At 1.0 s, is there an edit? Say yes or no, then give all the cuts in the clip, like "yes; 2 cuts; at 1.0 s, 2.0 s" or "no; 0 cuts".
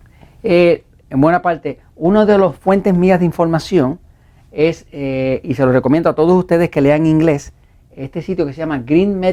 yes; 1 cut; at 1.0 s